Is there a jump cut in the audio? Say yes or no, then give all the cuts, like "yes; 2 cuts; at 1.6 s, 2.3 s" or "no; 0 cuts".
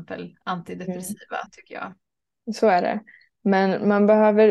yes; 1 cut; at 1.5 s